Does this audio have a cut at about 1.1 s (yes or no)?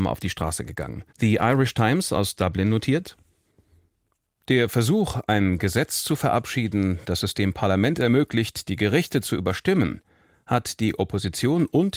yes